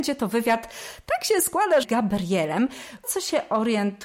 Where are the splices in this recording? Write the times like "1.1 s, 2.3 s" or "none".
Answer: 1.8 s, 3.0 s